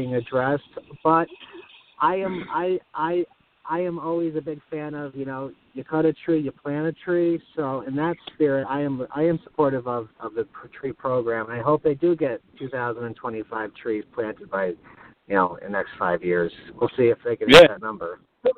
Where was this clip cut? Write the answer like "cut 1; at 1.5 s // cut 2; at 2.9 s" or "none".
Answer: none